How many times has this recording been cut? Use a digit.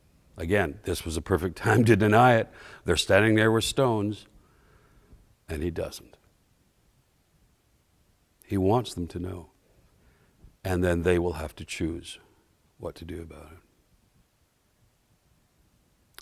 0